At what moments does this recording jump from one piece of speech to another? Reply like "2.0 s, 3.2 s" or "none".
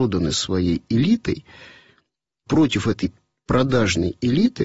2.5 s